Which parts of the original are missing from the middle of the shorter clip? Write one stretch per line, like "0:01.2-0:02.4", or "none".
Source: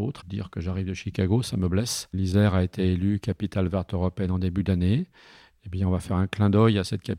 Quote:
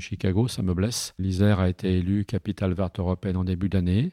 none